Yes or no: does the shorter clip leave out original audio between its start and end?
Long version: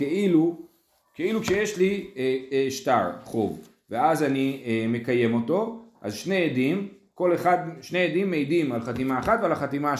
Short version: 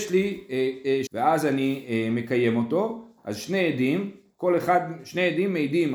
yes